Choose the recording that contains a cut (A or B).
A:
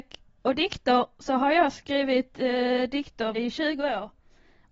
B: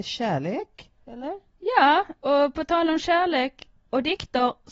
A